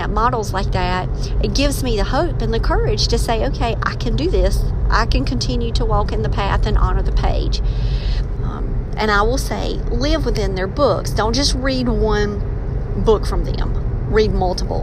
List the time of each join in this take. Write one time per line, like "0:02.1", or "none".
0:08.4